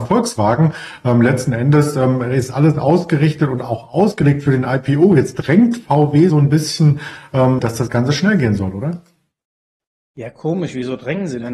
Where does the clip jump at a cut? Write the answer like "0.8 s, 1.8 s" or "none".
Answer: 6.3 s, 7.6 s